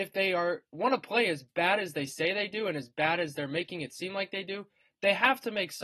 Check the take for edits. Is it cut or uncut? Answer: uncut